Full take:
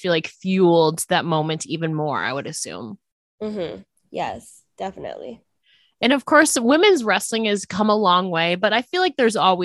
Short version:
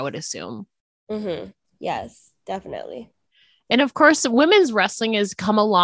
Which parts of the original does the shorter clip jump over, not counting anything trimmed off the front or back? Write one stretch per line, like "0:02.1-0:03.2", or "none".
none